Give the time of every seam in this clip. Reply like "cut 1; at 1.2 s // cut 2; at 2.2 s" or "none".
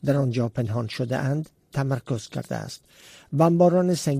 none